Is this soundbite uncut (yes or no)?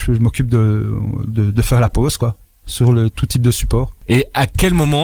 yes